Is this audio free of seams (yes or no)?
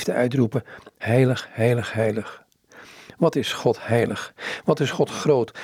yes